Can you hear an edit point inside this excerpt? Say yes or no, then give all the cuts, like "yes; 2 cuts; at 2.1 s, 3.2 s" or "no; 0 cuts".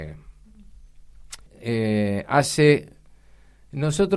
yes; 1 cut; at 1.5 s